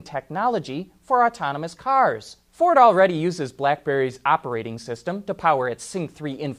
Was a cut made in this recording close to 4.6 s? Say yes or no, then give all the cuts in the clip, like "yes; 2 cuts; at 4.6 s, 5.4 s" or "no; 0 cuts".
no; 1 cut; at 2.5 s